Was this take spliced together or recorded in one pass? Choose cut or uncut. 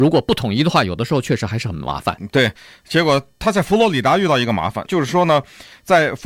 cut